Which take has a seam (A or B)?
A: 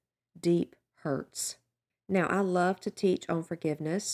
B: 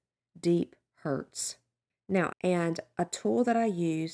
B